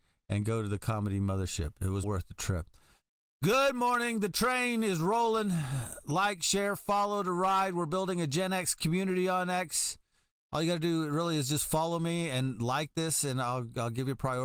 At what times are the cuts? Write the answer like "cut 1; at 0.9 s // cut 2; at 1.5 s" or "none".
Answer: cut 1; at 2.0 s